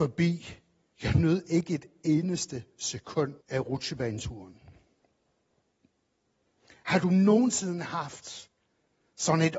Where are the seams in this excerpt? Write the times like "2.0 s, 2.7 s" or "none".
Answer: 0.9 s, 3.4 s